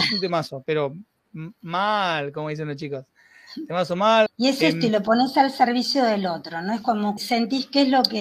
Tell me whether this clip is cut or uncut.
cut